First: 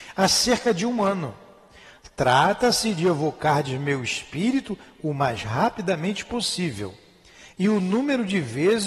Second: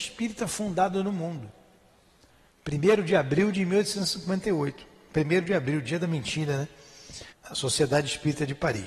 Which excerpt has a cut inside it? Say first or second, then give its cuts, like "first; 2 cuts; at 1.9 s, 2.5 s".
second; 1 cut; at 7.3 s